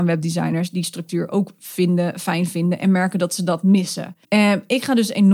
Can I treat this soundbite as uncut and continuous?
no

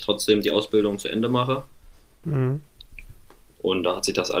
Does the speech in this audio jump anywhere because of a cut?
yes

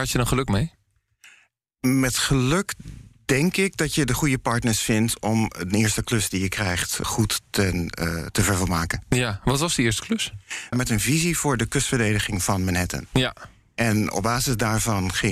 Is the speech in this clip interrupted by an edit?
yes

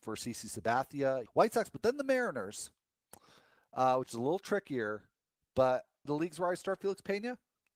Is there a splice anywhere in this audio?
yes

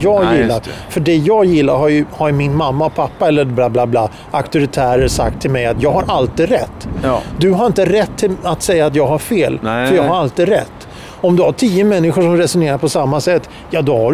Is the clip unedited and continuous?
yes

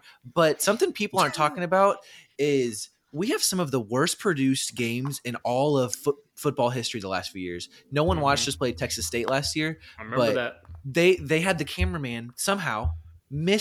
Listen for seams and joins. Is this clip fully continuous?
yes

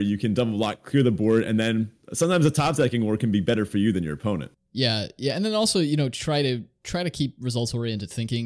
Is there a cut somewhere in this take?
no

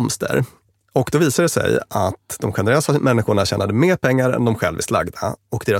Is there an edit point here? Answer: no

